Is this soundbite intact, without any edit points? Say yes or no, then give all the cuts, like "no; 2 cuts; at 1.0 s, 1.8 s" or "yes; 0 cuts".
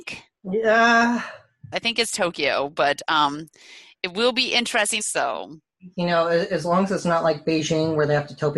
no; 2 cuts; at 1.7 s, 5.0 s